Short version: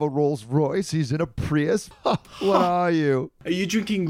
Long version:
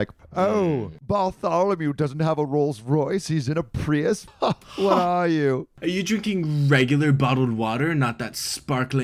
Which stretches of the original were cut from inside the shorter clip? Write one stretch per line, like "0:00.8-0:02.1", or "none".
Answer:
none